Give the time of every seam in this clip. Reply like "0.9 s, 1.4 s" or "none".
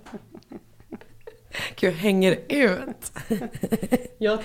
none